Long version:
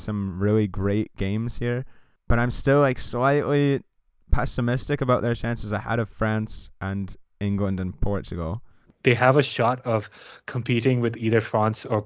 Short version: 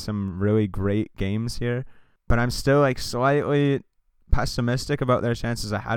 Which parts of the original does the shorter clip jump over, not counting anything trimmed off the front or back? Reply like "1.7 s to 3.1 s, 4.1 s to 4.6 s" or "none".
none